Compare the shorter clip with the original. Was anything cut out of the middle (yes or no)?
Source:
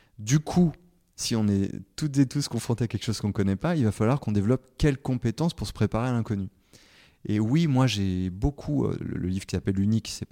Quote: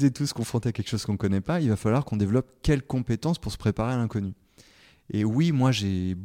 no